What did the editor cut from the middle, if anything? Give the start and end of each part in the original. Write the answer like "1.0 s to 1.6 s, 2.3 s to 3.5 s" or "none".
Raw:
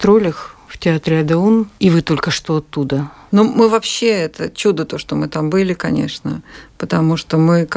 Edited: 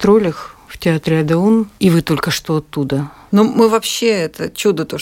none